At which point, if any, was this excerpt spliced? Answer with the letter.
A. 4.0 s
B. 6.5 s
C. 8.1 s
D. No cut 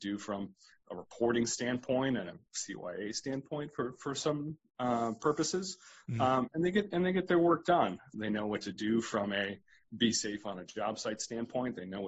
C